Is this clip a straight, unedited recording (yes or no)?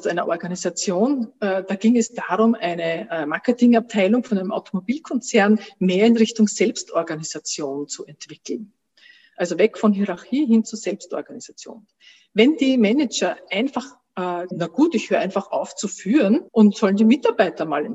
no